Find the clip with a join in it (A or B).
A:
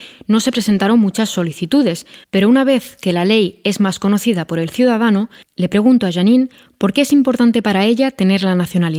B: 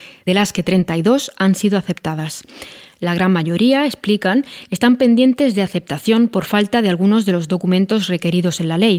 A